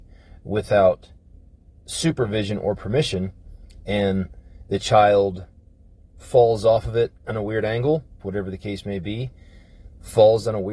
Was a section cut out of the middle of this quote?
yes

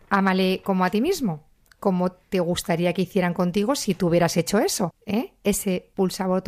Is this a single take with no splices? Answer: no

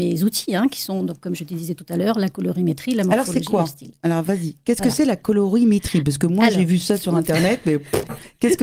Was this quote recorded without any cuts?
yes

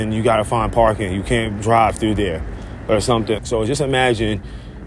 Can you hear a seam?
yes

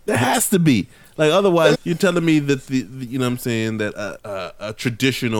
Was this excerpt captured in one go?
no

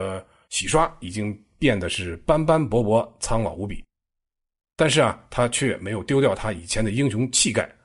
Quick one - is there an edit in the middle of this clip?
no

